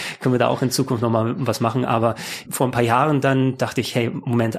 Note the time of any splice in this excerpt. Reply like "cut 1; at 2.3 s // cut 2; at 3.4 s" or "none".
cut 1; at 2.5 s